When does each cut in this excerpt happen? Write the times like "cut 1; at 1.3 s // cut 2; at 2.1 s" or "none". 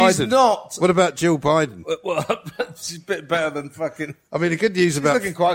none

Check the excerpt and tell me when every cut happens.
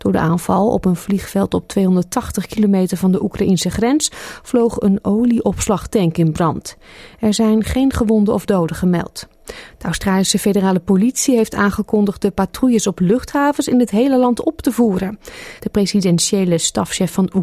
cut 1; at 9.7 s // cut 2; at 15.6 s

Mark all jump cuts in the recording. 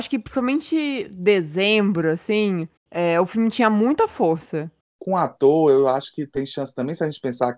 cut 1; at 4.8 s

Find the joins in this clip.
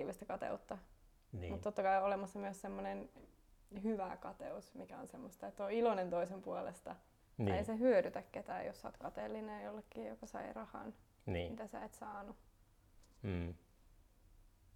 cut 1; at 7.2 s

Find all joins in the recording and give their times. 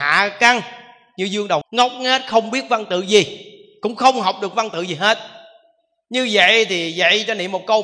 cut 1; at 1.6 s

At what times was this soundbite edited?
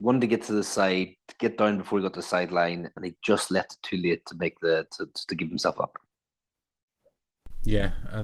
none

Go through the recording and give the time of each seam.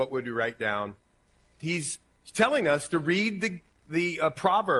cut 1; at 1.6 s

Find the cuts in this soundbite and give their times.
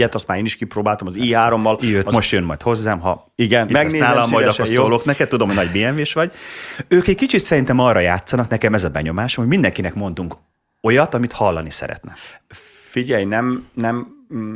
none

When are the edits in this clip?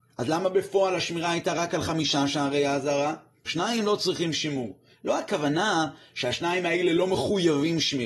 cut 1; at 3.5 s

